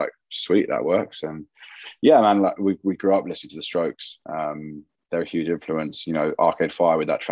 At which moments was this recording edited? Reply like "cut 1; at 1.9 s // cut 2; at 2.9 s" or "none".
none